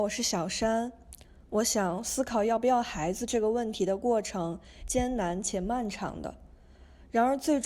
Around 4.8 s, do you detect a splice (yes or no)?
yes